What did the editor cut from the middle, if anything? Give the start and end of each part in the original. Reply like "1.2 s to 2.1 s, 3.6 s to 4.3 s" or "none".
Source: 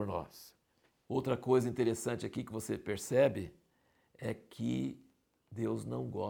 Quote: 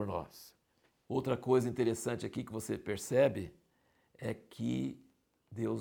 none